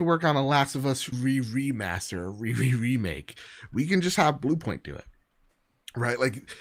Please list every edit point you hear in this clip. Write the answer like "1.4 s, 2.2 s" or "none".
1.1 s